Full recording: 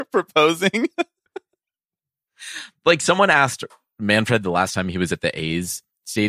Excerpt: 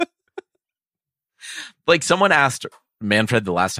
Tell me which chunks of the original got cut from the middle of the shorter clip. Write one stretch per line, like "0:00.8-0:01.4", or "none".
none